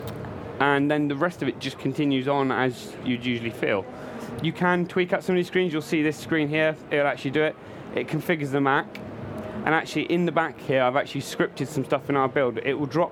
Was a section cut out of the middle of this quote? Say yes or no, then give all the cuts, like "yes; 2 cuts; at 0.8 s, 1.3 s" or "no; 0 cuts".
no; 0 cuts